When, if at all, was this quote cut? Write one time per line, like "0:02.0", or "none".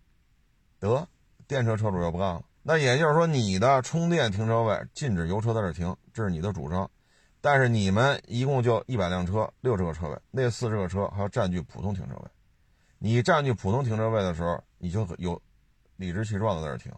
0:02.5